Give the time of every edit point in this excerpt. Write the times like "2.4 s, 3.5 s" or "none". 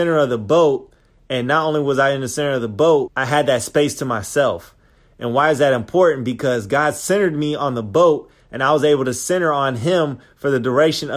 3.1 s